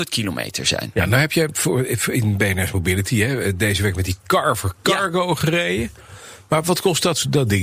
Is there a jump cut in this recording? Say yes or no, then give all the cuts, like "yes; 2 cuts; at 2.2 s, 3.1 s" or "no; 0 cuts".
no; 0 cuts